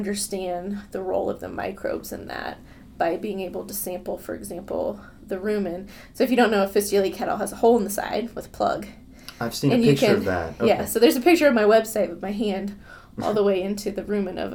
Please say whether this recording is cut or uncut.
uncut